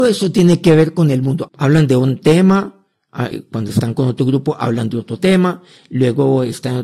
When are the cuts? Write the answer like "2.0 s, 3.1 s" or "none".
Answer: 1.5 s, 3.3 s